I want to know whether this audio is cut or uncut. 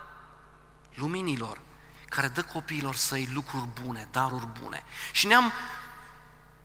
uncut